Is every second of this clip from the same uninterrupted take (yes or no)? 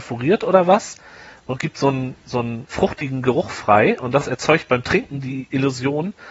no